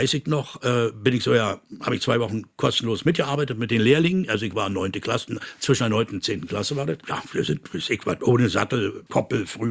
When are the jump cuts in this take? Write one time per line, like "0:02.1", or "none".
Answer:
none